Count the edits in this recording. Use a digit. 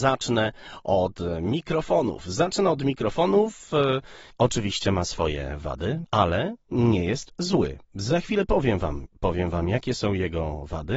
3